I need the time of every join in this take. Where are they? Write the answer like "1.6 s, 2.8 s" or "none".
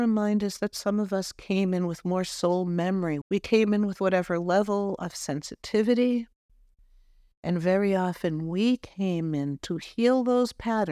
3.2 s